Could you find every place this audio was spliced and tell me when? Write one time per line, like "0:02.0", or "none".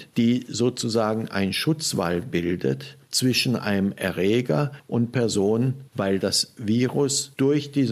0:05.9